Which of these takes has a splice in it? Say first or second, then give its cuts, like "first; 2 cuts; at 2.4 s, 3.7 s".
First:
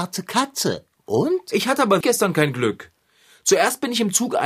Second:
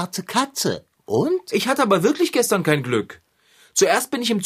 first; 1 cut; at 2.0 s